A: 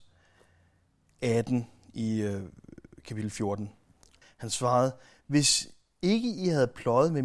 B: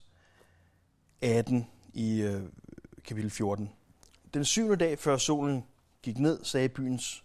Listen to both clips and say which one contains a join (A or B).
A